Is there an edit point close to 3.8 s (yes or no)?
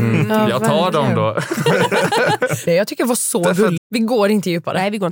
yes